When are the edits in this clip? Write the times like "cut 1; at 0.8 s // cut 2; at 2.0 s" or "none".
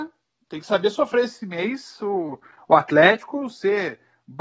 none

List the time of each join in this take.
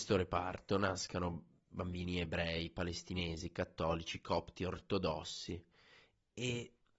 none

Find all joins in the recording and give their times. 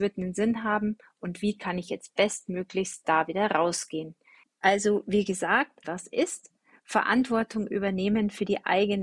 cut 1; at 4.4 s // cut 2; at 5.8 s

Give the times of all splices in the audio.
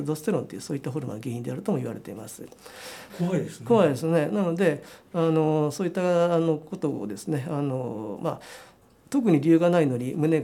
cut 1; at 3.1 s

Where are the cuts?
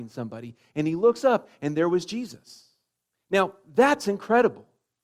cut 1; at 3.1 s

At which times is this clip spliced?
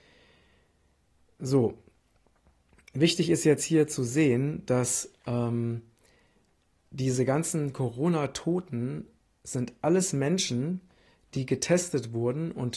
none

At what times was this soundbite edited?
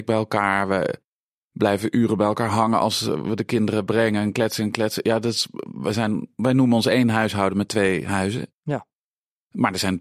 none

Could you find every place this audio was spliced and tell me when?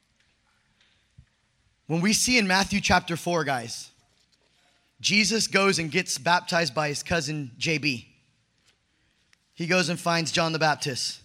none

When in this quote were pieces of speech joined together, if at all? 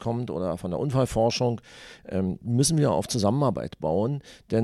cut 1; at 2.4 s

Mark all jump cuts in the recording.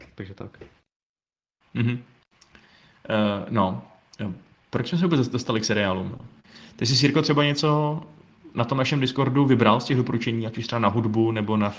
cut 1; at 6.1 s

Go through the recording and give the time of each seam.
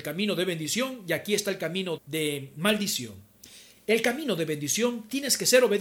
cut 1; at 2.0 s

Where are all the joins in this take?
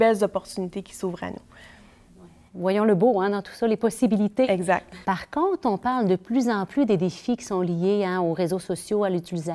cut 1; at 5.0 s

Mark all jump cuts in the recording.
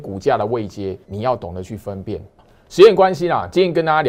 cut 1; at 1.0 s

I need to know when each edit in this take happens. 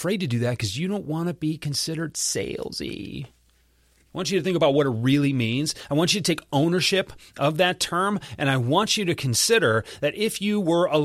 none

